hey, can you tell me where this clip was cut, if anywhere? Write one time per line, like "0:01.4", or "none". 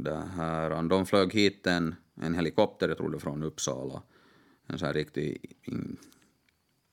0:05.6